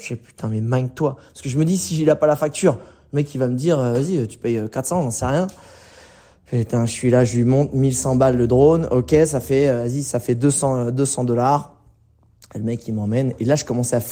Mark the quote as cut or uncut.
uncut